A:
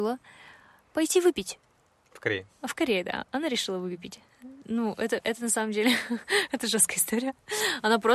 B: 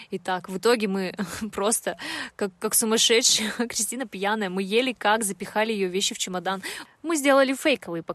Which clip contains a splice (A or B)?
B